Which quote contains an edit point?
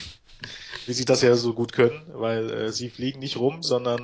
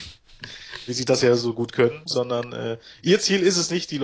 second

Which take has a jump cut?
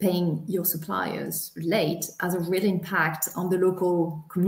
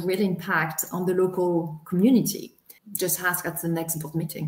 second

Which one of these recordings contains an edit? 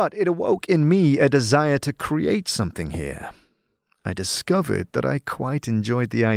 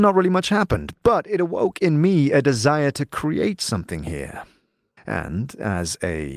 second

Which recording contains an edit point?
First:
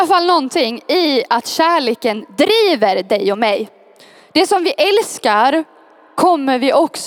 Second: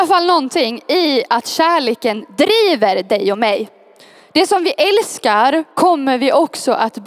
second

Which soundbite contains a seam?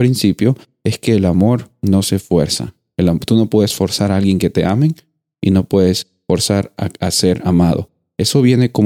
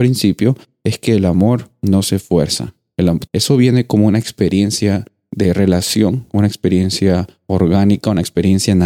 second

